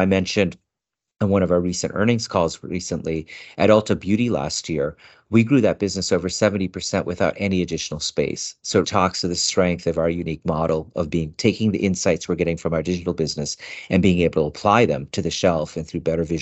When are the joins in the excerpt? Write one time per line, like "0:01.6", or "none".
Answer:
0:08.8
0:11.3